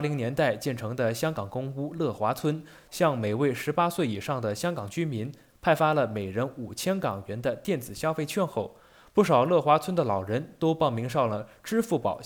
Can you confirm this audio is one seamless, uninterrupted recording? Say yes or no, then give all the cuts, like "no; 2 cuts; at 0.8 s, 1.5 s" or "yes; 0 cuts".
no; 1 cut; at 2.9 s